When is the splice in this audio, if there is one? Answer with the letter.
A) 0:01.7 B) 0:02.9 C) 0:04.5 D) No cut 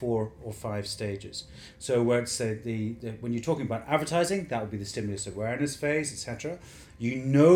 A